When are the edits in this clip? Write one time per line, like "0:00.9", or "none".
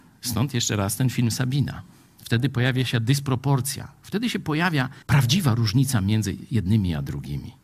0:05.0